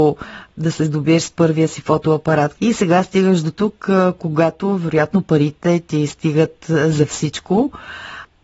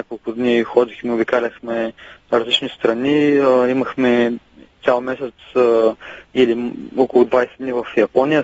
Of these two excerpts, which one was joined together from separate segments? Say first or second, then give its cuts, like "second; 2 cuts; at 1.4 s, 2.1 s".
first; 1 cut; at 2.5 s